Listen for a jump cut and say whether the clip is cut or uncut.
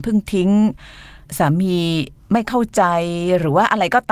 cut